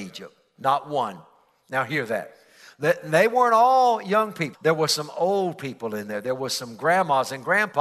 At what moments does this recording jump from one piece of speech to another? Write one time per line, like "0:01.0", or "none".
0:04.5